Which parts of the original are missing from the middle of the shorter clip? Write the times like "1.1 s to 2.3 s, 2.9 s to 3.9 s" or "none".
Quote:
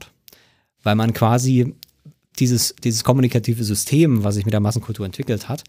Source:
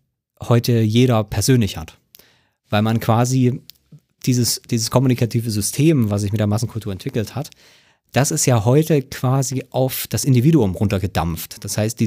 none